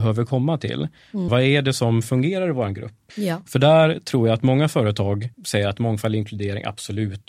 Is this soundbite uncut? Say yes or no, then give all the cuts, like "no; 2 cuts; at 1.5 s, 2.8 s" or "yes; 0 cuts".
no; 3 cuts; at 1.3 s, 3.1 s, 5.3 s